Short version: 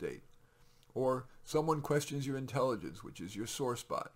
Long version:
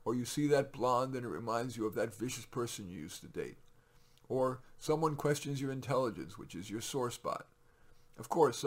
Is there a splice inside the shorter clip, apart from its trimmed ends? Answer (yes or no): no